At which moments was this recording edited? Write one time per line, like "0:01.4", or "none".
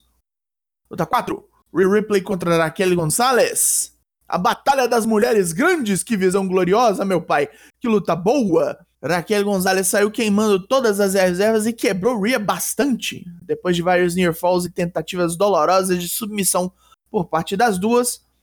0:08.9